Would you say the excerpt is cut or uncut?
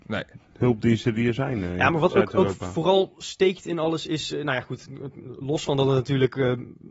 uncut